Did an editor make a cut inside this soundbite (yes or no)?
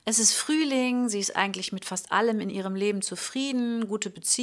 no